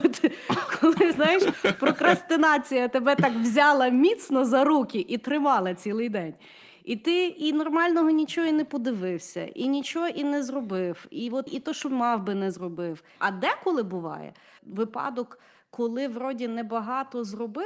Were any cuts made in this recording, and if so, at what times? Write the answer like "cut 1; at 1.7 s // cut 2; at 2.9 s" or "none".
cut 1; at 11.5 s // cut 2; at 13.2 s // cut 3; at 14.6 s